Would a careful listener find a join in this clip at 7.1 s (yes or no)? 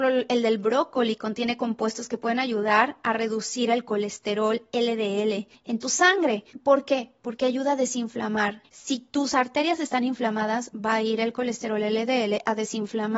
no